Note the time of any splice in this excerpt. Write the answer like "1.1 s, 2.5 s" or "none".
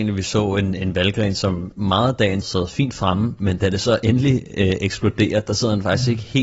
2.4 s